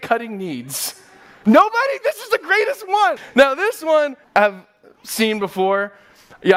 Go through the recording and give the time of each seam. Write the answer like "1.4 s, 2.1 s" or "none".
3.2 s, 4.2 s